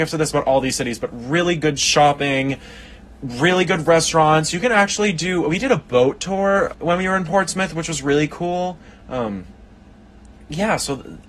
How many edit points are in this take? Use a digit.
1